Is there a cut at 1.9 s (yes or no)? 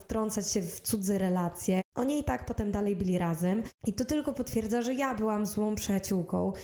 no